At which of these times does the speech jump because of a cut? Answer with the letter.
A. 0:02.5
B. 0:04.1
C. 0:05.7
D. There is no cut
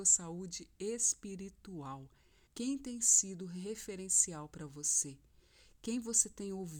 A